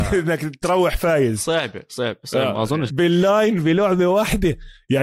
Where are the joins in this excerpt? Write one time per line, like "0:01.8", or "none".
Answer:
0:02.9